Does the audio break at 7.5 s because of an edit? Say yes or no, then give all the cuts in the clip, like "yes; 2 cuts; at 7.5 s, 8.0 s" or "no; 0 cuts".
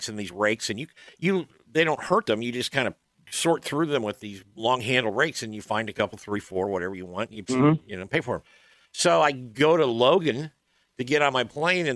yes; 1 cut; at 7.5 s